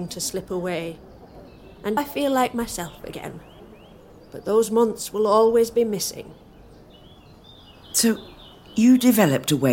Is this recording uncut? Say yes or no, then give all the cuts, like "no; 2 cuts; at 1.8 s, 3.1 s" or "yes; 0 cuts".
no; 1 cut; at 2.0 s